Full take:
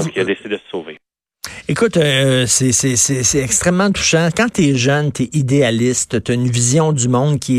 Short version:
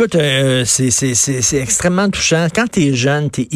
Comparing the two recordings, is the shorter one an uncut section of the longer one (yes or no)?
yes